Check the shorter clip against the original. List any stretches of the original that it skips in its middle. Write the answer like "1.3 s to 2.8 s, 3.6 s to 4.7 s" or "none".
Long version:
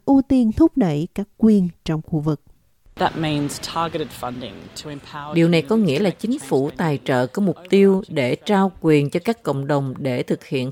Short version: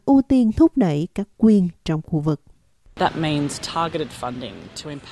none